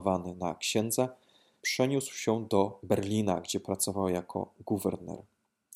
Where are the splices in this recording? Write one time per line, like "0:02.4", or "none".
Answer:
0:01.6

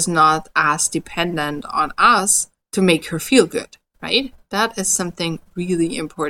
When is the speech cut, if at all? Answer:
none

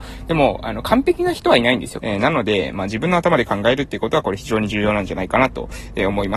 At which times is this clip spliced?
0:02.0

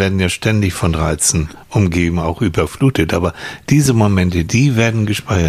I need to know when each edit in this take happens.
0:04.5

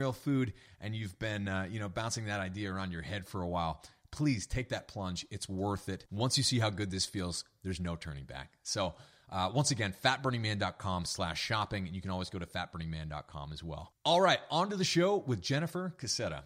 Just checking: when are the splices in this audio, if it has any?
none

